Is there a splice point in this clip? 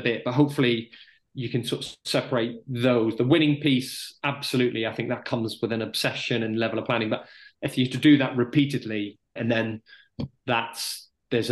yes; 1 cut; at 9.4 s

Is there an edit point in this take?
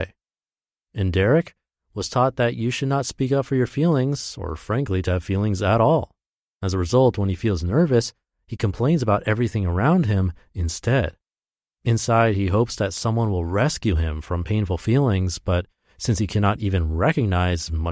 no; 0 cuts

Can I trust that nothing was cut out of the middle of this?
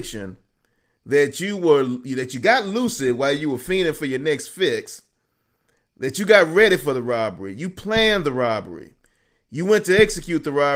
yes; 0 cuts

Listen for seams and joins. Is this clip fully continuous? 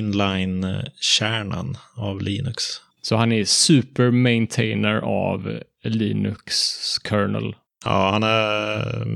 no; 1 cut; at 3.0 s

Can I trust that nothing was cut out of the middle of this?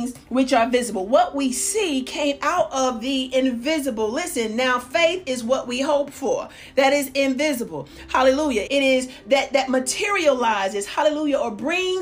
no; 1 cut; at 8.6 s

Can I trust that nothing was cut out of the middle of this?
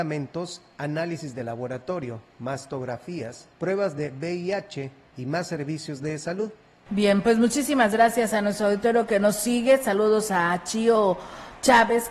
no; 2 cuts; at 3.5 s, 6.9 s

